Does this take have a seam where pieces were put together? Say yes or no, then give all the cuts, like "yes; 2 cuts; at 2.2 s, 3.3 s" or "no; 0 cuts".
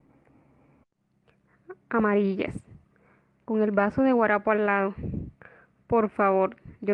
no; 0 cuts